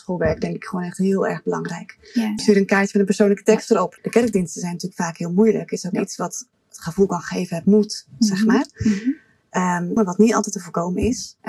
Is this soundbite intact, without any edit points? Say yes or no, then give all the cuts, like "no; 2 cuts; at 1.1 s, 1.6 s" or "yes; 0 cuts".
no; 3 cuts; at 2.4 s, 4.0 s, 10.0 s